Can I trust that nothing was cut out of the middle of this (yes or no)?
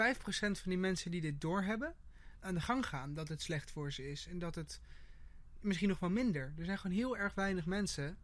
no